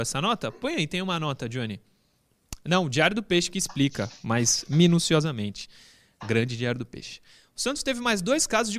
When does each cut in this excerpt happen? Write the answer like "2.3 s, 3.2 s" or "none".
none

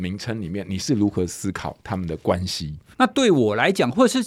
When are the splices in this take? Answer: 2.9 s

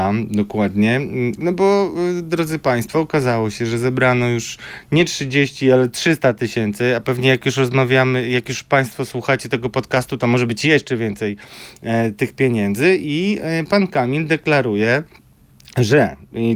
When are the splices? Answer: 1.4 s

